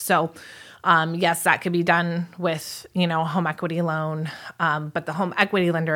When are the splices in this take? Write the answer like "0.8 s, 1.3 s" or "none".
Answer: none